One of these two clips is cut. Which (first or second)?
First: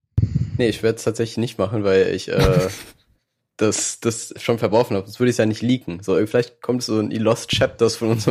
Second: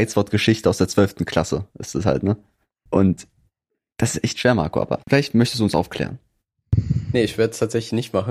second